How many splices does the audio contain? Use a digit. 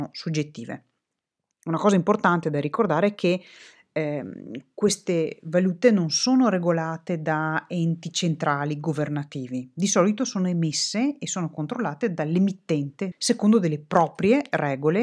2